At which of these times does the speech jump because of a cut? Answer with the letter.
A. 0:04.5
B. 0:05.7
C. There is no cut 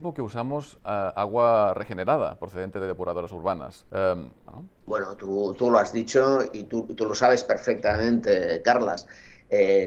A